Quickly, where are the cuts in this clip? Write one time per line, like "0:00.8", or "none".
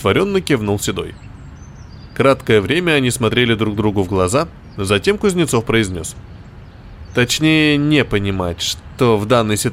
0:07.1